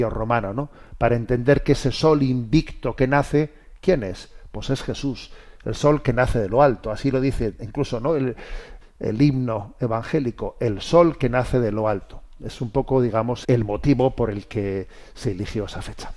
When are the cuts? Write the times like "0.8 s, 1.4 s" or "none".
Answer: 8.8 s, 13.4 s